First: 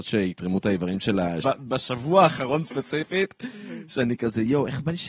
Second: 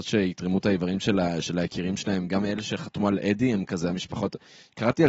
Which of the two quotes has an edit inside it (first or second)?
first